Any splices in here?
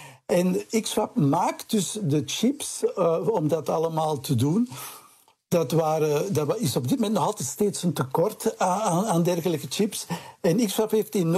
no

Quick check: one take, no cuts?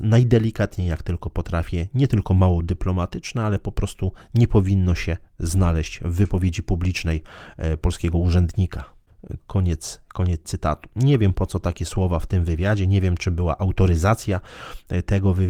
no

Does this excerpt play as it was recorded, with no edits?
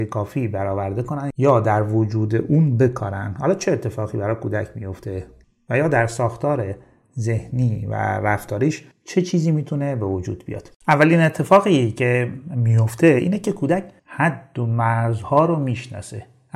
no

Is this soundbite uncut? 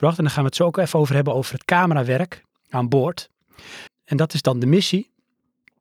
no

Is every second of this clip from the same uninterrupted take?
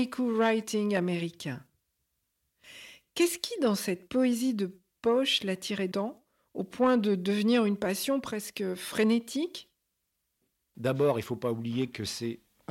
no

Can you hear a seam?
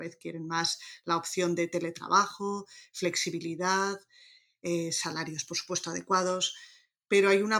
no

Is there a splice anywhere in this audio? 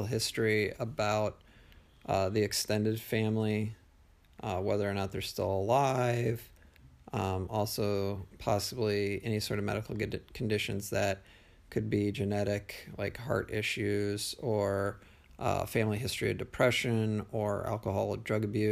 no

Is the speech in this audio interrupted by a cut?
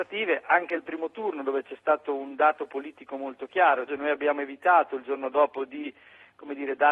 yes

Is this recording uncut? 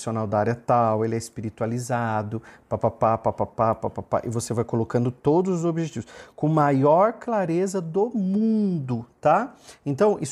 yes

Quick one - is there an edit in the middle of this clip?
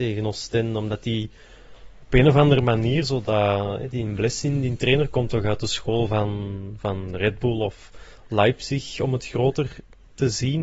no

